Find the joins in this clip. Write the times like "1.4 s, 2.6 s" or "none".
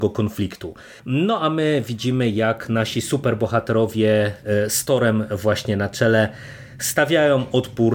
1.0 s